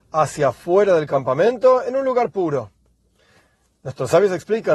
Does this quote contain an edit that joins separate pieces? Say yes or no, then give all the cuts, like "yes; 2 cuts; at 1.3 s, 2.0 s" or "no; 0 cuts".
no; 0 cuts